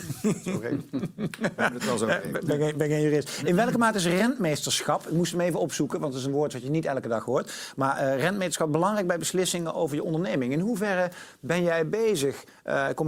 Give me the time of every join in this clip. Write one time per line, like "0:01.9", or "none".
none